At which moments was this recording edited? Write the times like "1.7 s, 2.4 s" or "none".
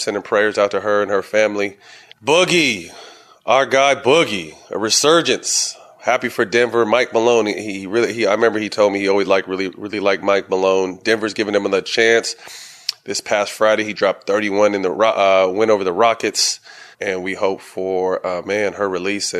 2.1 s, 16.9 s